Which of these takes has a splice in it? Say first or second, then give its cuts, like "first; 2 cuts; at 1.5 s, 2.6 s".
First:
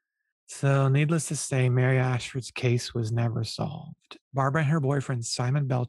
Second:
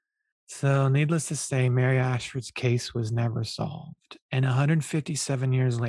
first; 1 cut; at 4.2 s